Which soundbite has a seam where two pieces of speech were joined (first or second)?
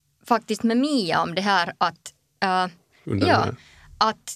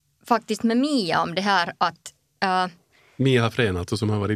first